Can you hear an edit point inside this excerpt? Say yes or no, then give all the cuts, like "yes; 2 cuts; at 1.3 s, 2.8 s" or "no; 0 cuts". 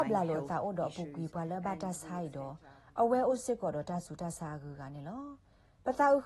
no; 0 cuts